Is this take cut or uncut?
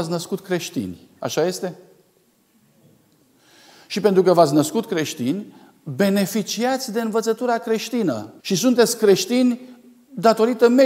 cut